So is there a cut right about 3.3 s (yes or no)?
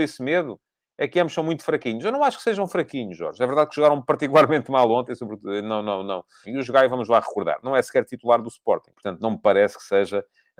no